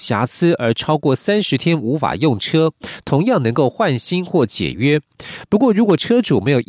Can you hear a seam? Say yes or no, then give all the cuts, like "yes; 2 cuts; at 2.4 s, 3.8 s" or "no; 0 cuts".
no; 0 cuts